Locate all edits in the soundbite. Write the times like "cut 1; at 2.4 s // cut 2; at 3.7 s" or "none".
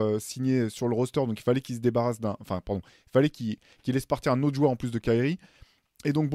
none

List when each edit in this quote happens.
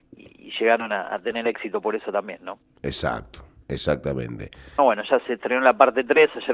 cut 1; at 4.8 s

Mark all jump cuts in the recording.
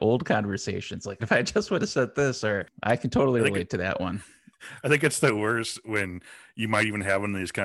cut 1; at 1.2 s

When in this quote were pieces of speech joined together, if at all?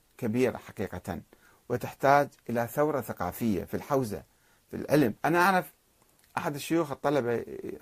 cut 1; at 5.2 s

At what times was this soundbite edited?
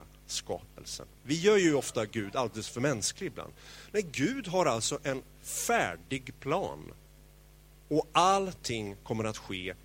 cut 1; at 1.2 s

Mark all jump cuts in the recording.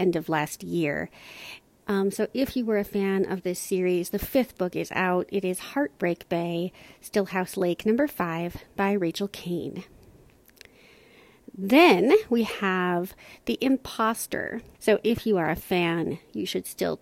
cut 1; at 1.8 s // cut 2; at 14.7 s

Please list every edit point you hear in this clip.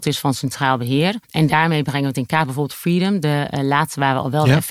cut 1; at 1.2 s

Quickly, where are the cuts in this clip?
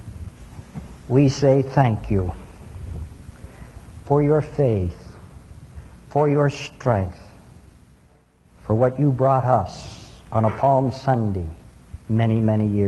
none

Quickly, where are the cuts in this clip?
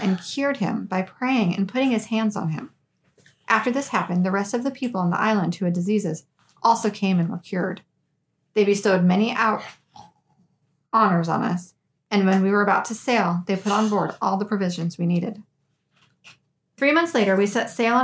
none

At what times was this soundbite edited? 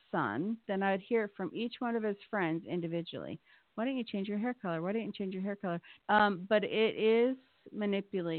cut 1; at 6.0 s

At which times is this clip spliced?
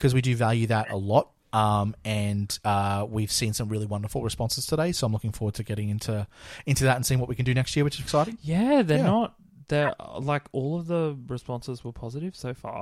cut 1; at 8.0 s

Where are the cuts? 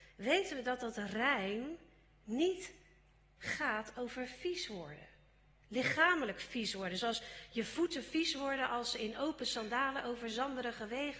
cut 1; at 3.4 s

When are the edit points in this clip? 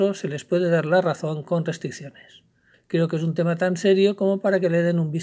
cut 1; at 2.7 s

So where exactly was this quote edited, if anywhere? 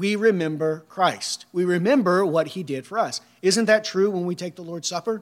none

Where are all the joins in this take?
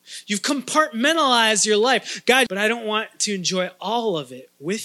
cut 1; at 2.5 s

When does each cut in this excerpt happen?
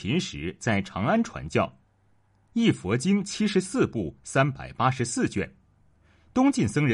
none

